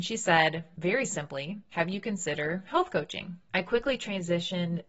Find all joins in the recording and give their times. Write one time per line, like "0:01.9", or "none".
0:03.5